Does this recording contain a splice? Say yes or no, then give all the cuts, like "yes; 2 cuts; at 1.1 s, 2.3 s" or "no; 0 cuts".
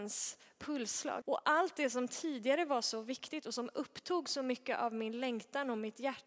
yes; 1 cut; at 1.2 s